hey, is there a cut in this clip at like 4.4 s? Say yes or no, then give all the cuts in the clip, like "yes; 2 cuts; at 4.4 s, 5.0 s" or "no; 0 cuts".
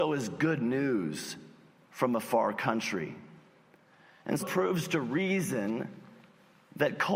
yes; 1 cut; at 4.4 s